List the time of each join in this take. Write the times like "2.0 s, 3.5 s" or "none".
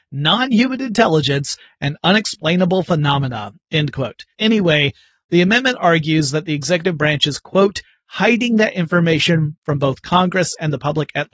4.3 s